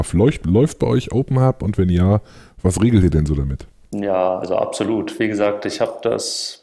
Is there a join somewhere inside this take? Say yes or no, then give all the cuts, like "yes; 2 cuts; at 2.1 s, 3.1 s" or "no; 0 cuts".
no; 0 cuts